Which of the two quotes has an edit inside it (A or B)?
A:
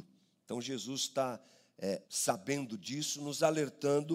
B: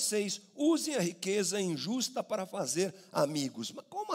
A